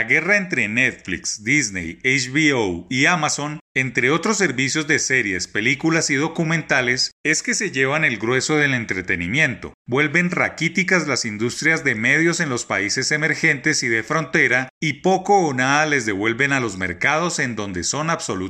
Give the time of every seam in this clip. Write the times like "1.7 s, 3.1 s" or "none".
none